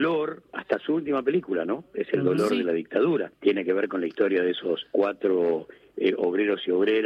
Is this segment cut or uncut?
uncut